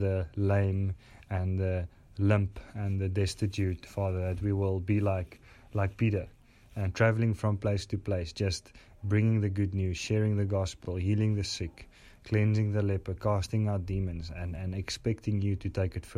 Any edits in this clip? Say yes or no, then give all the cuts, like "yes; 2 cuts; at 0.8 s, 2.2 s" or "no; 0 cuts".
no; 0 cuts